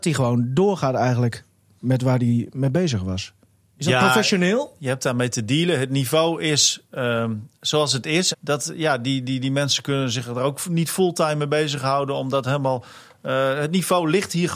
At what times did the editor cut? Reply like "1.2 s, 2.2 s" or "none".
4.8 s, 8.3 s